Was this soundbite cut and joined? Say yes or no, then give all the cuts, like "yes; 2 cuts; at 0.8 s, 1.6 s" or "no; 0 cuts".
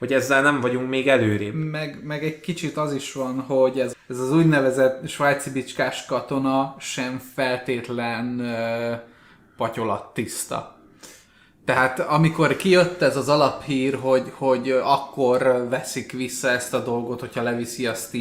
yes; 1 cut; at 3.9 s